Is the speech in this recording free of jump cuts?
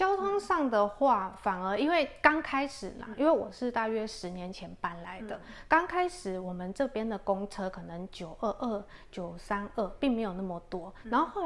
yes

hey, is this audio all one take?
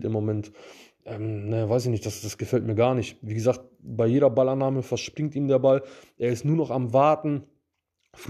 yes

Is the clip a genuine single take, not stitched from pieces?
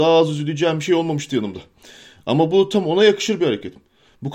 yes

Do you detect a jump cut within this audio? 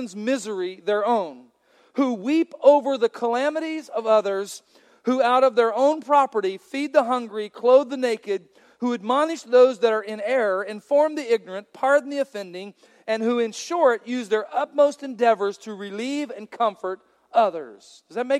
no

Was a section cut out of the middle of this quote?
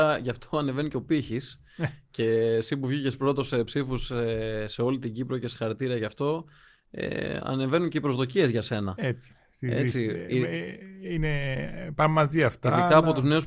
no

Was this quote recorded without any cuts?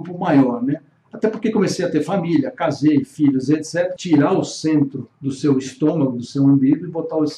no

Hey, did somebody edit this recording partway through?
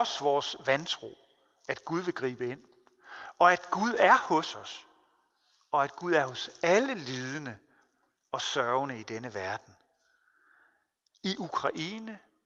no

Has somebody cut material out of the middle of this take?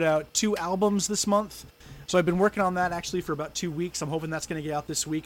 yes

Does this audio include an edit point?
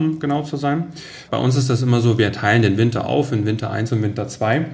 yes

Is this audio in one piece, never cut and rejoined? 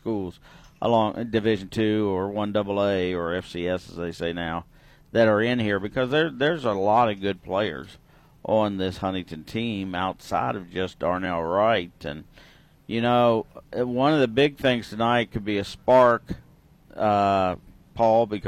yes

